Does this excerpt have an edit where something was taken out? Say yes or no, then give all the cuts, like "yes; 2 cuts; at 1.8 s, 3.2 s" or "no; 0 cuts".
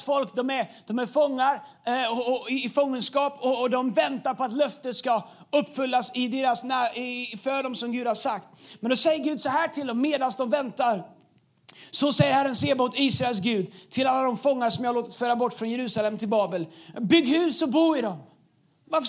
no; 0 cuts